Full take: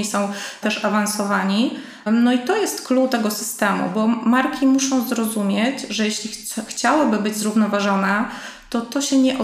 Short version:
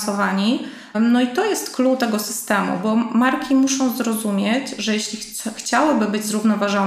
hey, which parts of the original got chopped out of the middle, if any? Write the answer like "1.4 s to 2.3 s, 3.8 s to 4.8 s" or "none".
none